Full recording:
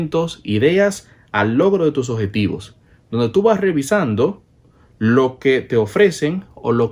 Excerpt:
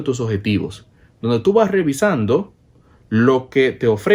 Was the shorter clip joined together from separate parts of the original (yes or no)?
no